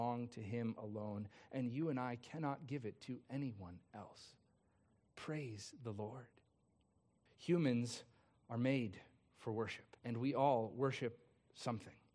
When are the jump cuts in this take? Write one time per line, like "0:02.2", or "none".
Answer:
0:07.3
0:10.0